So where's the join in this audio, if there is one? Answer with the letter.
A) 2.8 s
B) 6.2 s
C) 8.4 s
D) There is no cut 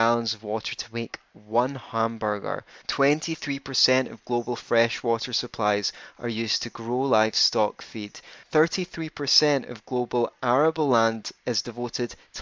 C